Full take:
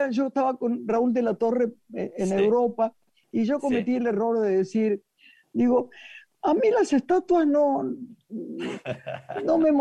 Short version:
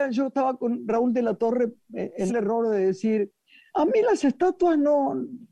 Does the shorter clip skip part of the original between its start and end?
yes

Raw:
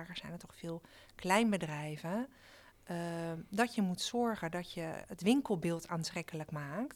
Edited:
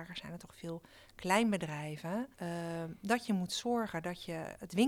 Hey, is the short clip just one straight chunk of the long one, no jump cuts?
no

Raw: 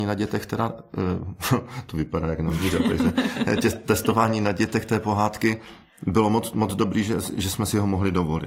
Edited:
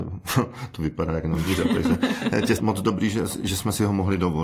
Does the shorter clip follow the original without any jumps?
no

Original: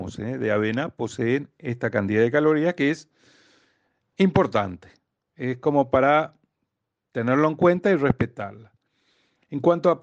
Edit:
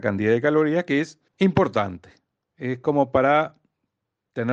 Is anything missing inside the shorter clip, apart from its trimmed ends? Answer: yes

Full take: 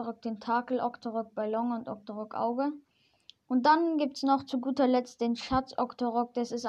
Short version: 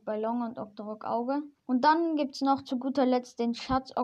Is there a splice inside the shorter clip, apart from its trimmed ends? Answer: yes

